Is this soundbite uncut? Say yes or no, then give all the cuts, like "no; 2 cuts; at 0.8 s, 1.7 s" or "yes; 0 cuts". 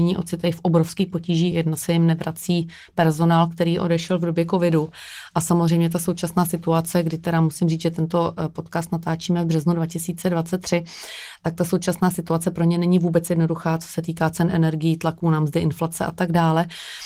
yes; 0 cuts